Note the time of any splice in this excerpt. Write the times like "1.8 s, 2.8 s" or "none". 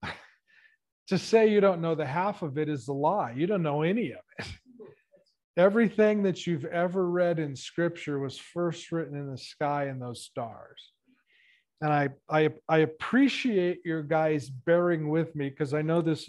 none